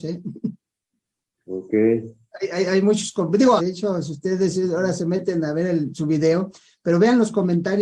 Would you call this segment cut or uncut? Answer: cut